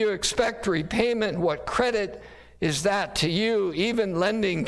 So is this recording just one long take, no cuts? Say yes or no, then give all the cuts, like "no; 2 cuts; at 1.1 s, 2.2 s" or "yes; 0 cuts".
yes; 0 cuts